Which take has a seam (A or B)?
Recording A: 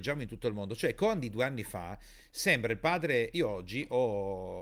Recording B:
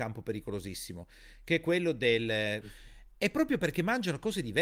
B